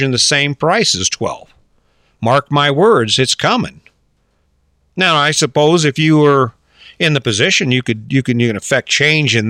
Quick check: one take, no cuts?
yes; 0 cuts

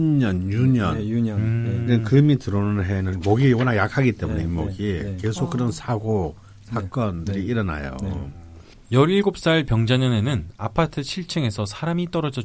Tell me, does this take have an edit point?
no; 0 cuts

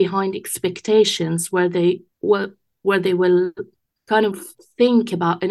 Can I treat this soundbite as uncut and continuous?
no; 1 cut; at 2.1 s

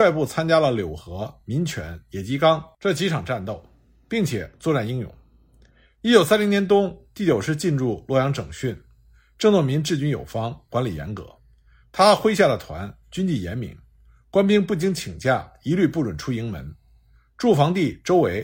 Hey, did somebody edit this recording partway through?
no; 0 cuts

